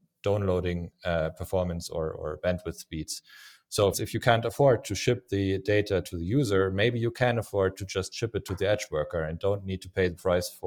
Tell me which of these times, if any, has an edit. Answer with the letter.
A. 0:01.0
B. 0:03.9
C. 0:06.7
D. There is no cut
B